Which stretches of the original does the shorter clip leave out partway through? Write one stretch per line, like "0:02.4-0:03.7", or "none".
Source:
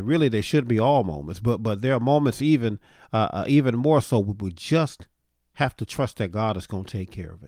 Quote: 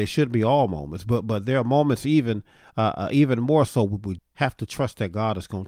0:04.5-0:05.4